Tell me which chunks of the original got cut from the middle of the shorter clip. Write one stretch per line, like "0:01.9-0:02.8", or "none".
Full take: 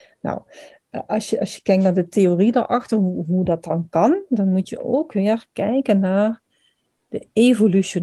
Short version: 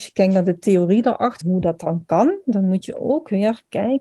0:02.9-0:03.2